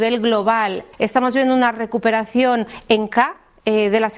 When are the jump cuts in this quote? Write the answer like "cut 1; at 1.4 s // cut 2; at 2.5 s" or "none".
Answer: cut 1; at 0.9 s